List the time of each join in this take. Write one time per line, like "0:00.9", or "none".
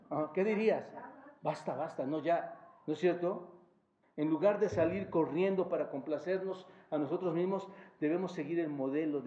0:04.0